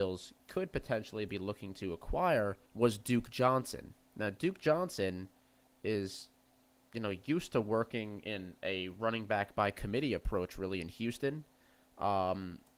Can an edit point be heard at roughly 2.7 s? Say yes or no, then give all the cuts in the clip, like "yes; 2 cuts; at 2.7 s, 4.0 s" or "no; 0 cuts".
yes; 1 cut; at 2.7 s